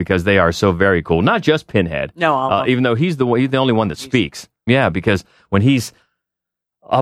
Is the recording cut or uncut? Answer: cut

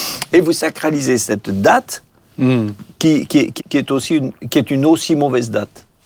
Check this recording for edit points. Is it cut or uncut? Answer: cut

